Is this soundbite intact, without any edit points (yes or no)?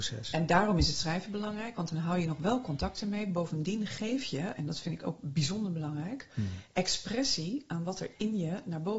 yes